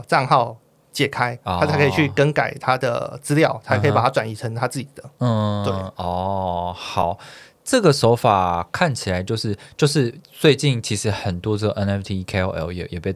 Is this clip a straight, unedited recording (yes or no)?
yes